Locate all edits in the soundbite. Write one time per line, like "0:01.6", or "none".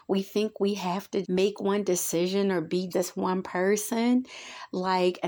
0:01.2
0:02.9